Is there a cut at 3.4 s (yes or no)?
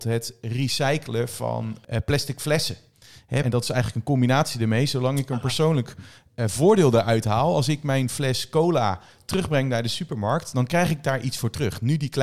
yes